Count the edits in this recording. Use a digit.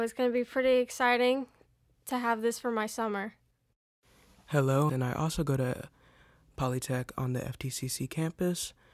1